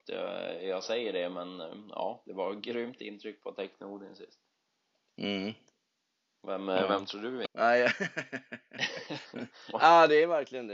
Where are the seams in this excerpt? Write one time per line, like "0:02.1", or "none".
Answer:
0:07.4
0:09.7